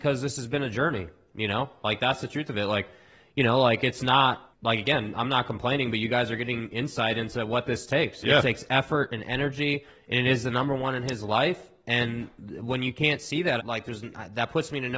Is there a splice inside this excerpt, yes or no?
yes